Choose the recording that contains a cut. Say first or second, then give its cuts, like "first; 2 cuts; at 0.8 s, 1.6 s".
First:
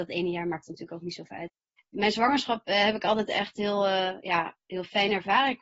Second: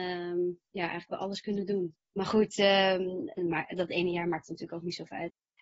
second; 2 cuts; at 2.1 s, 3.4 s